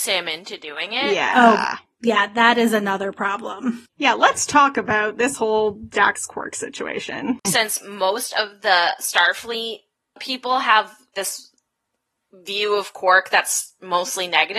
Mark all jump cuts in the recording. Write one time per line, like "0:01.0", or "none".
0:07.4
0:11.1